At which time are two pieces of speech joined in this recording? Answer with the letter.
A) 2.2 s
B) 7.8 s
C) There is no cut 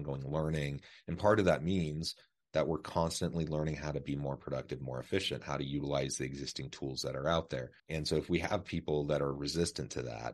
B